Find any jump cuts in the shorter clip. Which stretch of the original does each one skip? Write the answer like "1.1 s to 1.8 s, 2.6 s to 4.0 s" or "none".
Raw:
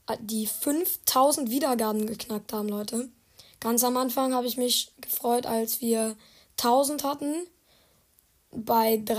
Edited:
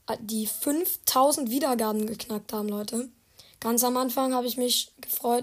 none